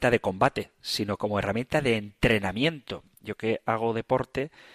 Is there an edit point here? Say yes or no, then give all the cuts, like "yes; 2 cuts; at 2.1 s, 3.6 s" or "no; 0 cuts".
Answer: no; 0 cuts